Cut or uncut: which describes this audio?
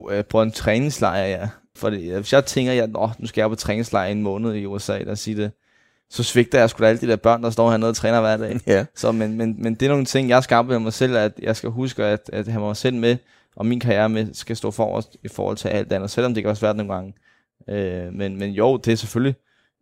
cut